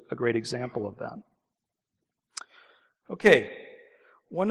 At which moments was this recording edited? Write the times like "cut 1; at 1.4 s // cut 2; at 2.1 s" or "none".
none